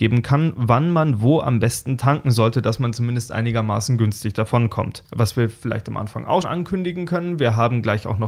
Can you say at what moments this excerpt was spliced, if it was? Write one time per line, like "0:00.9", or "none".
0:05.0
0:06.4